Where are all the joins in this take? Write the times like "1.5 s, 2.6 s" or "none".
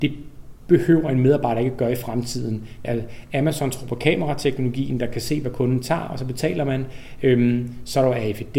2.8 s

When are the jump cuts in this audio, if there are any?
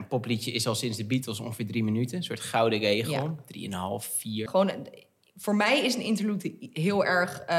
4.5 s

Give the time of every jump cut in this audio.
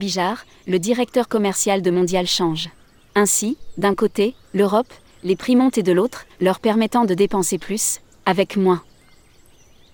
3.1 s, 6.3 s

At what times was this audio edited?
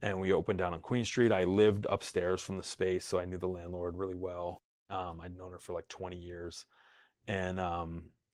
none

